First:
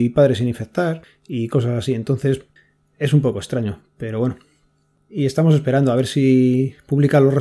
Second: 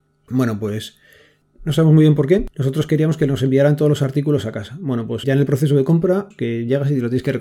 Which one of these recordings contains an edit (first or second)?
second